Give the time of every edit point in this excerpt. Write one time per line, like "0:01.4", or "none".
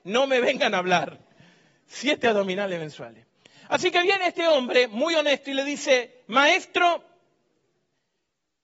none

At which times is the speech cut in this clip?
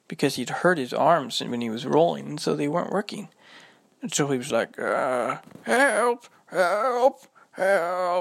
none

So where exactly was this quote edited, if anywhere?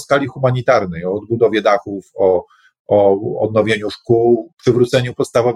0:04.5

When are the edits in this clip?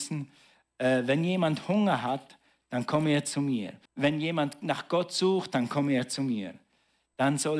0:03.9

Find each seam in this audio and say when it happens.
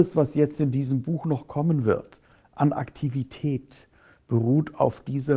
none

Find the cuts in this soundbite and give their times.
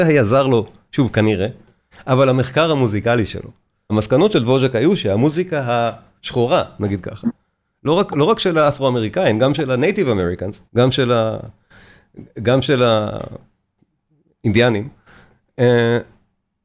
0:01.9
0:03.9
0:10.7

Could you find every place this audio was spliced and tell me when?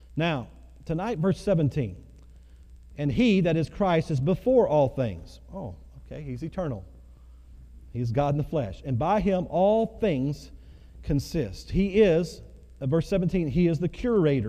none

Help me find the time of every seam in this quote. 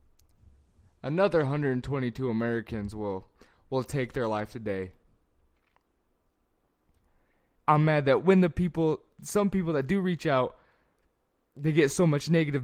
0:07.6

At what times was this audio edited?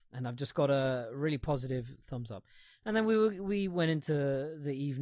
none

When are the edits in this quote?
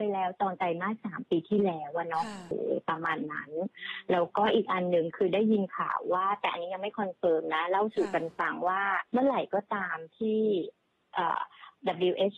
0:02.5
0:09.1

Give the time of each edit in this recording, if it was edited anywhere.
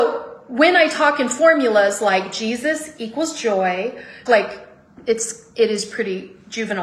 0:04.3

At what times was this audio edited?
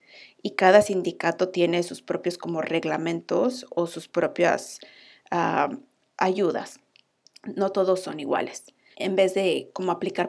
0:08.9

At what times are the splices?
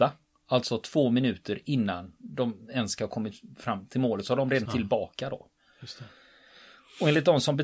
0:04.7

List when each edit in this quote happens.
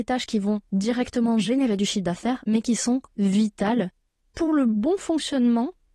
none

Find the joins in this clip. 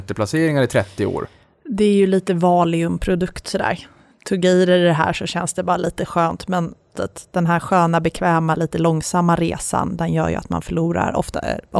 0:06.9

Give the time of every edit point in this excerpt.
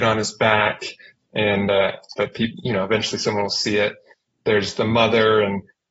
0:02.1

